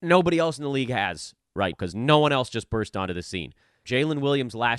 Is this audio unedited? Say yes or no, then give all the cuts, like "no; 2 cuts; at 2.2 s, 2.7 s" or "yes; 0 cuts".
no; 2 cuts; at 1.7 s, 3.9 s